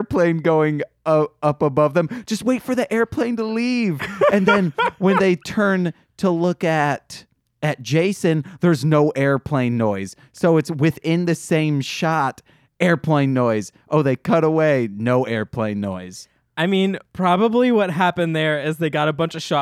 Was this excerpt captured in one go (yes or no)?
yes